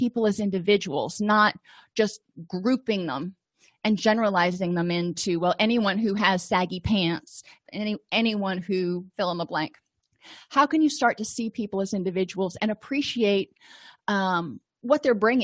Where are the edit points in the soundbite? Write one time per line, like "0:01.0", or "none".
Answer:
0:07.6
0:09.1